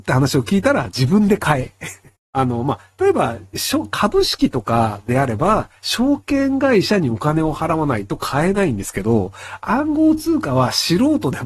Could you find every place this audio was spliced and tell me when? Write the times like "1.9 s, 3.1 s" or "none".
2.1 s